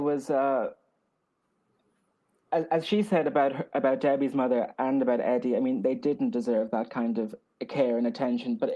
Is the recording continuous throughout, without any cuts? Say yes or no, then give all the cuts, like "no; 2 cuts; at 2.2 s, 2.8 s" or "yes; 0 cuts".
yes; 0 cuts